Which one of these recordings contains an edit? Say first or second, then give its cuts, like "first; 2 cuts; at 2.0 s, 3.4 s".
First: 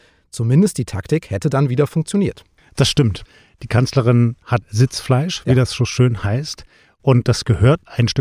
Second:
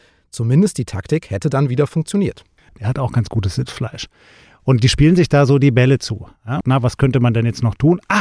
second; 2 cuts; at 2.7 s, 6.6 s